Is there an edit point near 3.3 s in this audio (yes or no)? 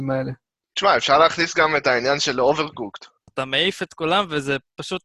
yes